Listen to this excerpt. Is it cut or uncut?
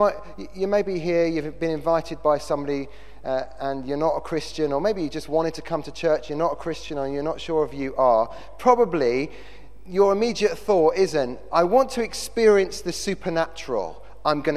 uncut